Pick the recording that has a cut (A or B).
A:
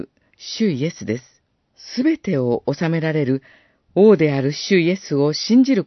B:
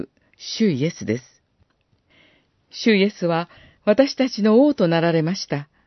A